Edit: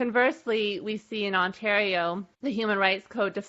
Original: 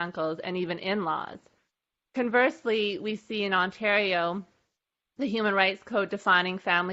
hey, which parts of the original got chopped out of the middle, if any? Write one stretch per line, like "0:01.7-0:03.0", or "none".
0:04.5-0:05.1